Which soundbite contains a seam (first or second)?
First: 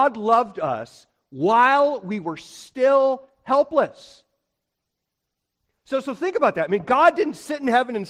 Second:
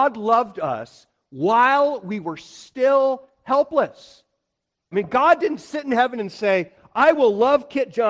second